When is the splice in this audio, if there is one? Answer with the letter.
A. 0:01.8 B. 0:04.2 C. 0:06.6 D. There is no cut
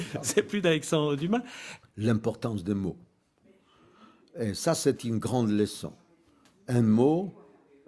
A